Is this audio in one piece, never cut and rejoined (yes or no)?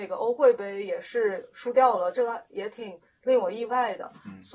yes